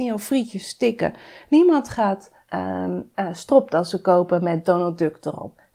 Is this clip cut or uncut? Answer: cut